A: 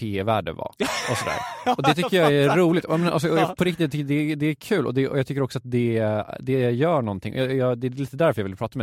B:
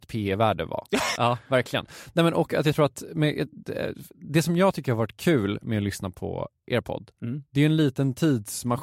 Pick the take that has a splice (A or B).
B